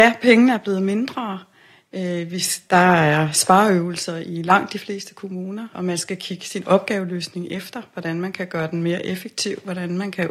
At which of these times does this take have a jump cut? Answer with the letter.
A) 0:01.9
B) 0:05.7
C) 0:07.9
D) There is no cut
B